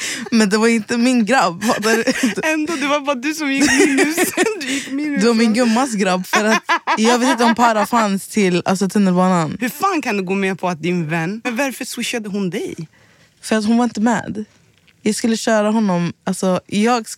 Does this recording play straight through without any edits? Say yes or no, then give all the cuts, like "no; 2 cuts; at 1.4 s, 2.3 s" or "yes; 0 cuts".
no; 3 cuts; at 6.2 s, 9.6 s, 11.4 s